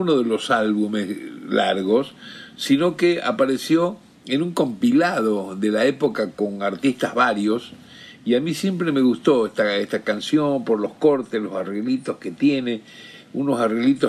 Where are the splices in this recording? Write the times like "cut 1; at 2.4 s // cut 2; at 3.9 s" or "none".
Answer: none